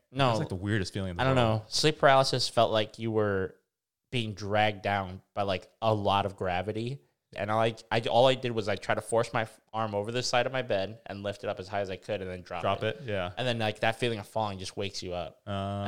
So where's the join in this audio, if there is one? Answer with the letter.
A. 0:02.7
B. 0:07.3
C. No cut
B